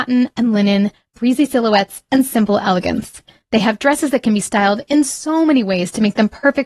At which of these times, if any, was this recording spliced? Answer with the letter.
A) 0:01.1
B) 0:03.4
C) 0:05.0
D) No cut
D